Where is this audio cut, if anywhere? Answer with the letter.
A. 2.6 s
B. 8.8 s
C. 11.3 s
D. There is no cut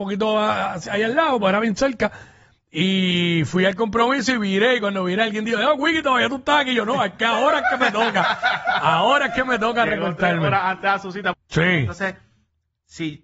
C